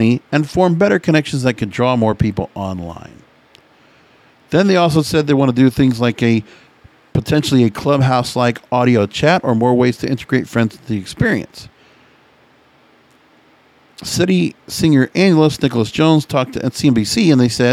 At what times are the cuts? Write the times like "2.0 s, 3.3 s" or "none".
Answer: none